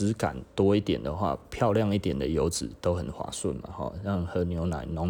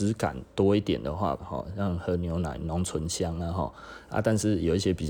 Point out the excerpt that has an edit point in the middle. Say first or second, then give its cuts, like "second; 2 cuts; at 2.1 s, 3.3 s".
second; 1 cut; at 1.4 s